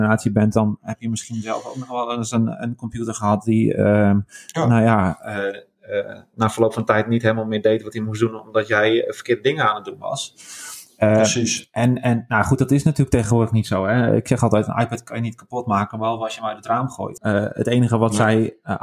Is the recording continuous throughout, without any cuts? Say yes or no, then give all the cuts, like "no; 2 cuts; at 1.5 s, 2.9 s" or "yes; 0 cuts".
no; 1 cut; at 17.2 s